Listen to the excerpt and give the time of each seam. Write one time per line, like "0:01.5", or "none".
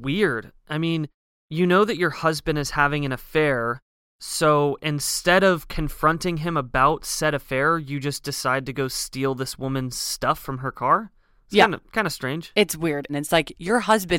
0:13.1